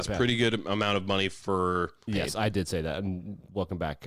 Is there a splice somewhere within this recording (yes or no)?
yes